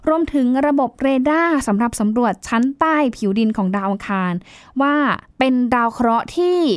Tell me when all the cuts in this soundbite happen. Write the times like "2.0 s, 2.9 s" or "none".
5.3 s